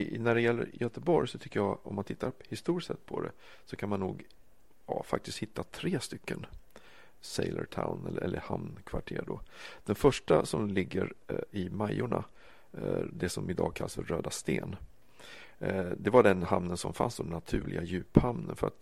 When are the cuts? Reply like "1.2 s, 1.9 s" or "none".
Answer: 7.1 s